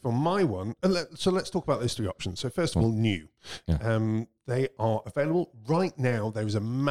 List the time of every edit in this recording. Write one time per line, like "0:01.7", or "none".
none